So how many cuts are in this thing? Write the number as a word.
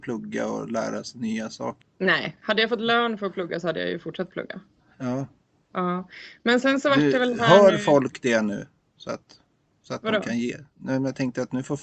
one